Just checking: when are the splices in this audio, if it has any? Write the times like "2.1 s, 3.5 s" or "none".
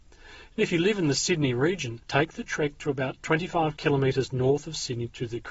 2.0 s